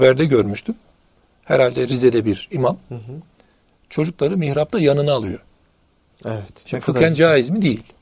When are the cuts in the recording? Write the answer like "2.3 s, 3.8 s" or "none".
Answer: none